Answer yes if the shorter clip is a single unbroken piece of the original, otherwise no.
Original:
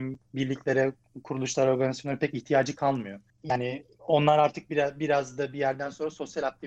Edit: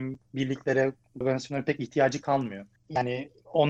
no